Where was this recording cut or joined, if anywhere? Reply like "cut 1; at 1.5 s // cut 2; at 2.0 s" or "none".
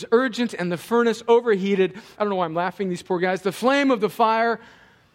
cut 1; at 2.2 s